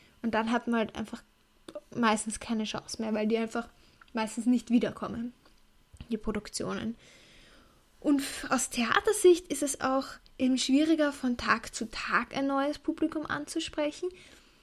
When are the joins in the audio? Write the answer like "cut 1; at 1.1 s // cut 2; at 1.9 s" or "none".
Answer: none